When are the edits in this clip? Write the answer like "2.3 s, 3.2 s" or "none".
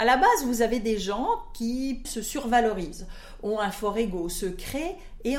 2.0 s